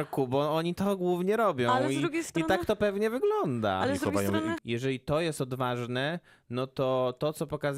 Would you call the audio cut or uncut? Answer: cut